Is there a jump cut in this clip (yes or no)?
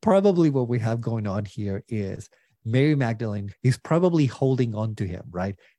yes